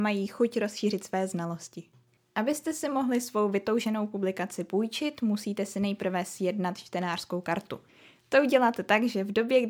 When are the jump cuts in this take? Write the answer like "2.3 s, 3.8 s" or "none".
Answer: none